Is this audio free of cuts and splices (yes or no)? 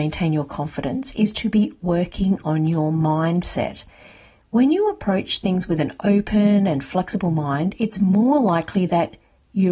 yes